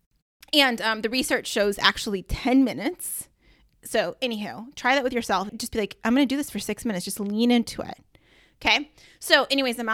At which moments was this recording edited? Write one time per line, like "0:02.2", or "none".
0:05.5

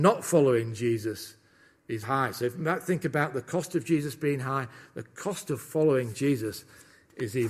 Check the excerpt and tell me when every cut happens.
0:02.0

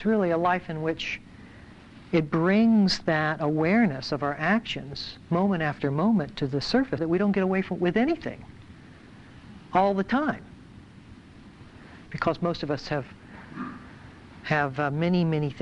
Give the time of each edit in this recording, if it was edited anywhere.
0:07.0
0:12.1

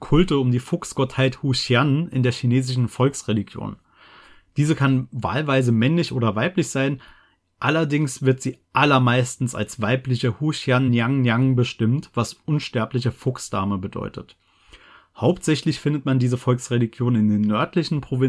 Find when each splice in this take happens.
none

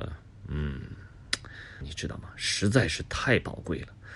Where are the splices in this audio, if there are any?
0:01.8

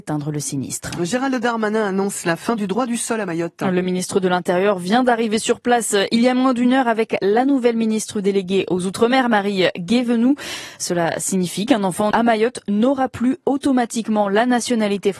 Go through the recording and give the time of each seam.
0:12.1

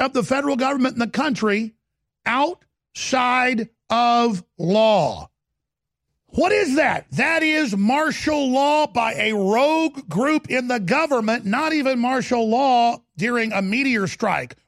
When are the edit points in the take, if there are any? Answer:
0:06.1

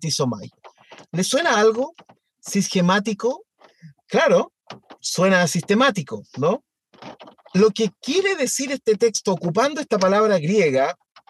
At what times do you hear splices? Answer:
none

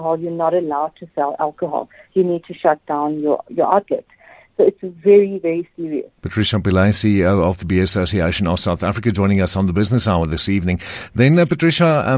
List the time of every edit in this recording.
0:03.5
0:06.2

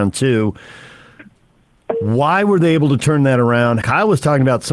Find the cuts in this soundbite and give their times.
0:03.8

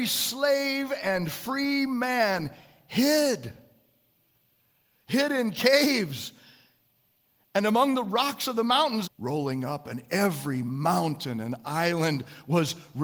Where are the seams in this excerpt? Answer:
0:09.0

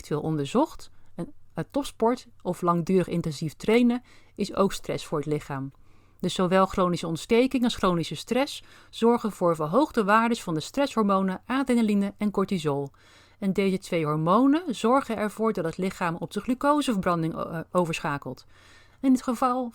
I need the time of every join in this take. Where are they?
0:01.5

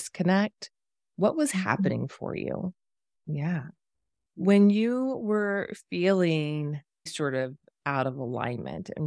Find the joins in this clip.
0:03.1
0:07.1

